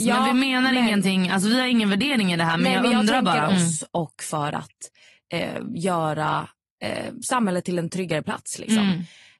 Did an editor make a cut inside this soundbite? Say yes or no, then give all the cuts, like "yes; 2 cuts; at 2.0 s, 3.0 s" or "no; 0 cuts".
yes; 1 cut; at 3.5 s